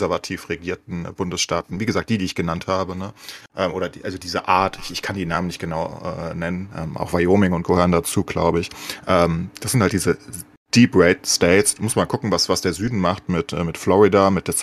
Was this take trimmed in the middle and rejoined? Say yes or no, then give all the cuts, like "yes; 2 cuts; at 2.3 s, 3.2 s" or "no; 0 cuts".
no; 0 cuts